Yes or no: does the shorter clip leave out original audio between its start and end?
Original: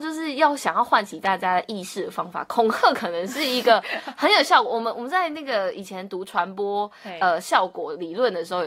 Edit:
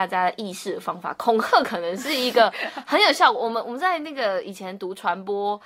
no